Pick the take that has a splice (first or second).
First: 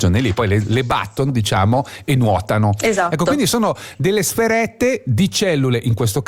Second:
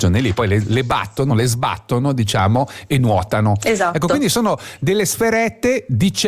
first